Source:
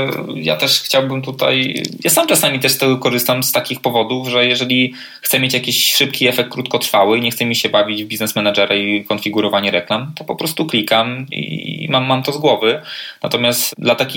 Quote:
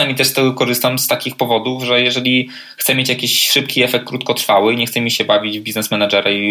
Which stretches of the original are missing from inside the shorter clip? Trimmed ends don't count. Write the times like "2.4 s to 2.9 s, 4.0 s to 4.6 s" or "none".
none